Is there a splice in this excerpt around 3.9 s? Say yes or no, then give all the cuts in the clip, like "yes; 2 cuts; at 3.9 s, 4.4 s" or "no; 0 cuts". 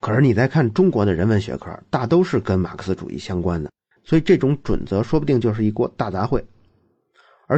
yes; 1 cut; at 3.9 s